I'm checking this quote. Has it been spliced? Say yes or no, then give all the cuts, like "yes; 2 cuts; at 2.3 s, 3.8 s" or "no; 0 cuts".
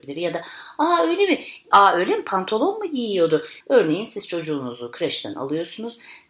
yes; 2 cuts; at 1.7 s, 3.6 s